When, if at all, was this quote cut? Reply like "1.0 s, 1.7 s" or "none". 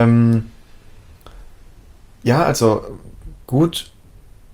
none

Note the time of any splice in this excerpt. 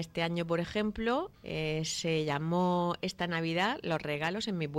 1.3 s

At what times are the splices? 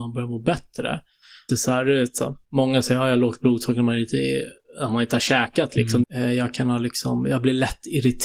1.5 s, 6.0 s

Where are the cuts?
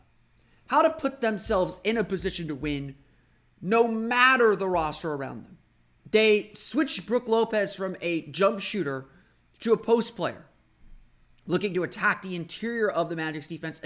6.0 s

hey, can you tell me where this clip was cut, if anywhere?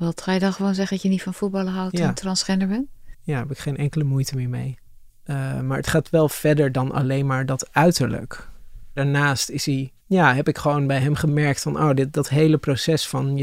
3.1 s, 5.1 s, 10.0 s

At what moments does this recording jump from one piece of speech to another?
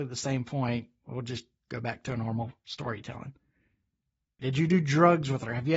4.4 s

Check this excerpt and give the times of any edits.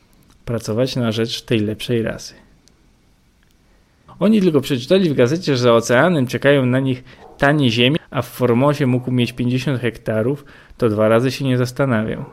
4.1 s, 8.0 s

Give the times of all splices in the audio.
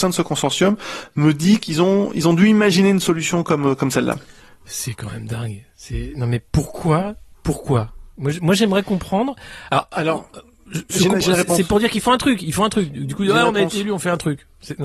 none

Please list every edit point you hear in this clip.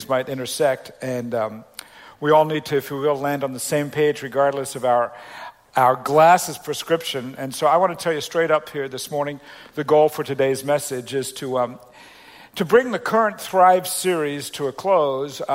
none

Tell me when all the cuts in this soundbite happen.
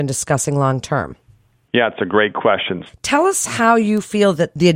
2.9 s

